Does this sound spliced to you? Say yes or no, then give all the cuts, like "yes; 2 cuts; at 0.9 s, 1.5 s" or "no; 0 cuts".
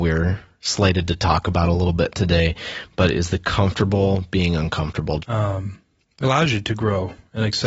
yes; 2 cuts; at 5.2 s, 6.2 s